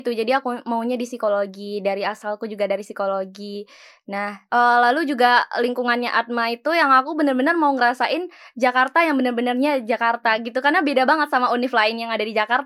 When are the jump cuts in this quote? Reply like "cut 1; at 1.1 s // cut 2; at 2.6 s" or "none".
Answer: none